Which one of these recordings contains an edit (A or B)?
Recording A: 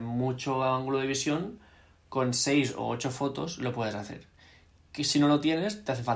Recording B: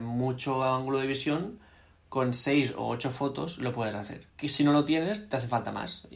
B